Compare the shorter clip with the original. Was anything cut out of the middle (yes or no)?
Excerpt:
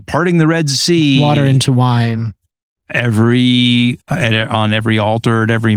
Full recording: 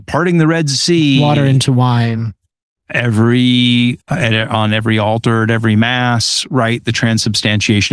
no